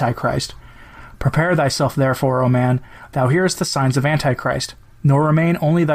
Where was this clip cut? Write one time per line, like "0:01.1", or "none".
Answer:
none